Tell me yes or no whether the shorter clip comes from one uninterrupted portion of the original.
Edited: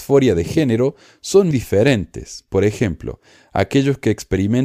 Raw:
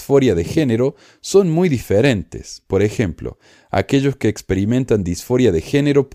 no